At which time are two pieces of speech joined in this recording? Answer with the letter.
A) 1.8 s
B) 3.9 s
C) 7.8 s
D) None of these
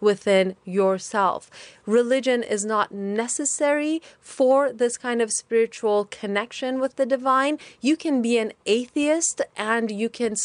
D